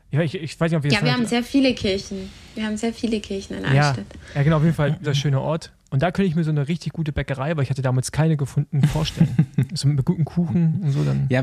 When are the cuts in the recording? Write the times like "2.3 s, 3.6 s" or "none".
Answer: 5.0 s